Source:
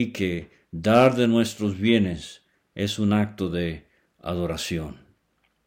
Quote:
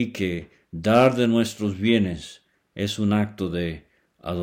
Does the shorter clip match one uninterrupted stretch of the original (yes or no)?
yes